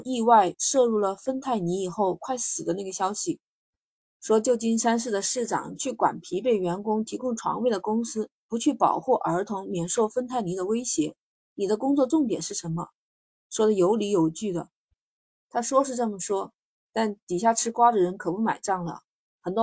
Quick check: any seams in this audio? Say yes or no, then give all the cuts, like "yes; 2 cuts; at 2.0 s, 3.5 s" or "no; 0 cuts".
no; 0 cuts